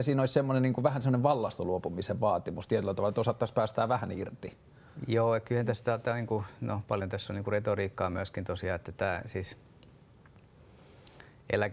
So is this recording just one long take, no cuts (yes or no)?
yes